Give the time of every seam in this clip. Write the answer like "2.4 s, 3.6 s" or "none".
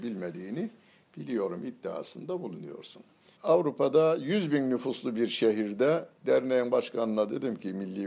3.3 s, 6.1 s